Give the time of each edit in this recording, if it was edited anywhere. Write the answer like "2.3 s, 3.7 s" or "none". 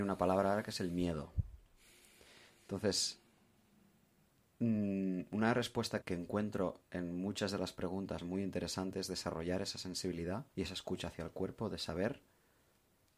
6.0 s, 10.5 s